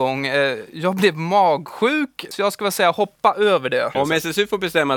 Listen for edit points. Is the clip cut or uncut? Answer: cut